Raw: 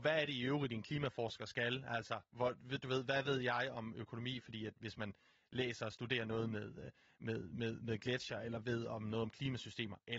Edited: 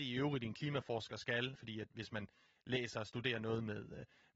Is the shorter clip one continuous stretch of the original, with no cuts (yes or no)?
no